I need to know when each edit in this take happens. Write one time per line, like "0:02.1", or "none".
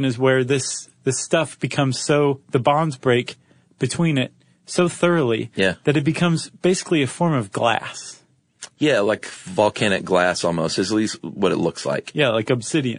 none